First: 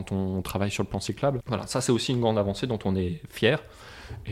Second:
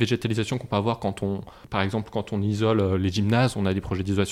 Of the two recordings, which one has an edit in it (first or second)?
first